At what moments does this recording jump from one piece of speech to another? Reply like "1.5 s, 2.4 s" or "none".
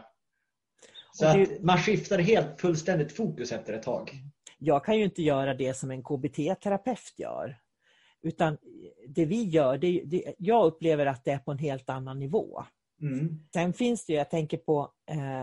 4.5 s, 13.5 s